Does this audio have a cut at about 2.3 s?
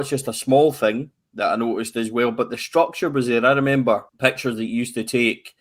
no; 1 cut; at 4.1 s

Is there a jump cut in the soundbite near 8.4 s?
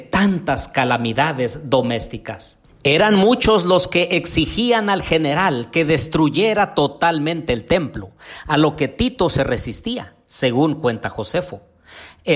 no; 1 cut; at 2.7 s

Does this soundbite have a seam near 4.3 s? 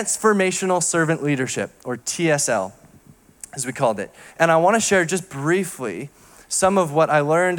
yes; 1 cut; at 4.3 s

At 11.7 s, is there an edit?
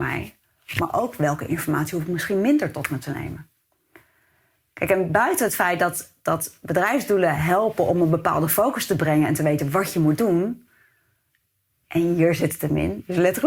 no; 0 cuts

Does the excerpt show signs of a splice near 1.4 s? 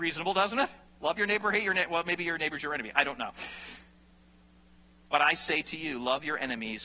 no; 0 cuts

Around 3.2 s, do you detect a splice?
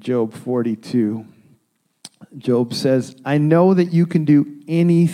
no; 0 cuts

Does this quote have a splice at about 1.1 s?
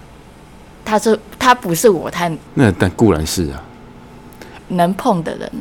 no; 2 cuts; at 2.5 s, 4.6 s

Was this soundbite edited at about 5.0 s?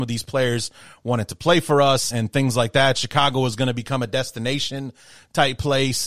no; 1 cut; at 2.1 s

